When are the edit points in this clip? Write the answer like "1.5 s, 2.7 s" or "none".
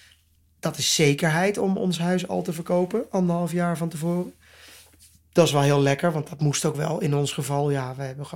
none